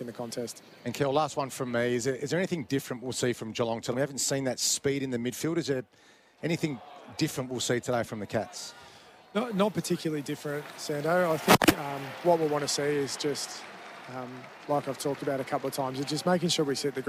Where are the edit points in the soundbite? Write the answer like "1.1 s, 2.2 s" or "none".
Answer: 3.9 s